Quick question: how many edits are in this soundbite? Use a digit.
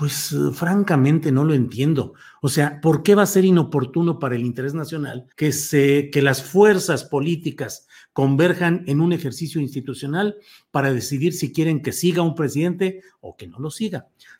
1